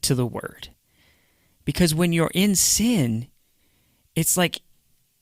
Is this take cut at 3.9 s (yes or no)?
no